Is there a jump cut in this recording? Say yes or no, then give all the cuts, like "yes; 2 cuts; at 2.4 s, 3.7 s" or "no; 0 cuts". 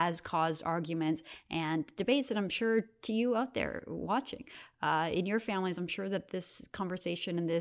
no; 0 cuts